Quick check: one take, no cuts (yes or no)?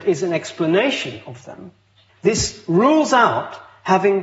no